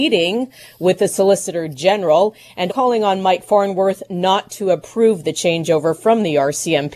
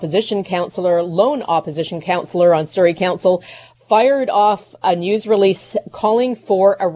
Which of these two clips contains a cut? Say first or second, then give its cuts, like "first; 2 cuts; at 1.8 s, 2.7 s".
first; 1 cut; at 2.7 s